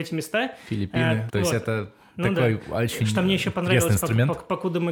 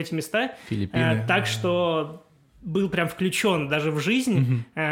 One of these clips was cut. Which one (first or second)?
first